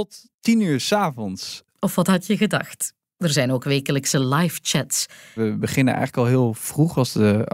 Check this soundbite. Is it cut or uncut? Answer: cut